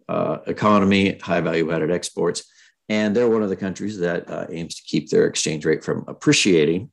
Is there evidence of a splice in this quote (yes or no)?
no